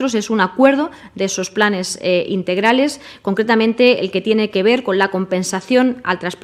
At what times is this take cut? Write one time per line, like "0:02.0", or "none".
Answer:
none